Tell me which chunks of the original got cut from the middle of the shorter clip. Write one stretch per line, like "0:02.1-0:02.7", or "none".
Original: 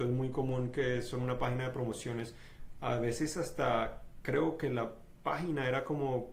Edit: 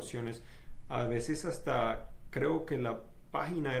none